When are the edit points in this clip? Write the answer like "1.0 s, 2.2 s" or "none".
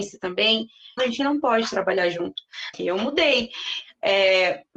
1.0 s, 2.7 s